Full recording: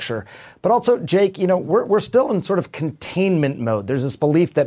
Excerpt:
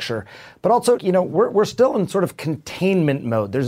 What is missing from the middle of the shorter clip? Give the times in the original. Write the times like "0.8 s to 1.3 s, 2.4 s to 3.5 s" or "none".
1.0 s to 1.3 s